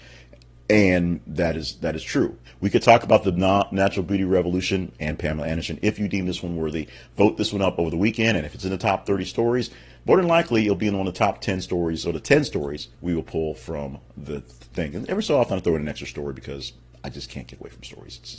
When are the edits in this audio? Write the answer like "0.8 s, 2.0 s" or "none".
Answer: 2.4 s